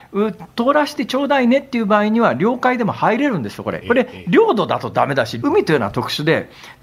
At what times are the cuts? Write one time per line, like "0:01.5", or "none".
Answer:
0:03.8
0:05.4